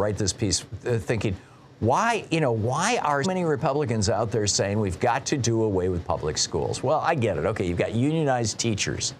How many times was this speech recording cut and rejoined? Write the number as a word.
one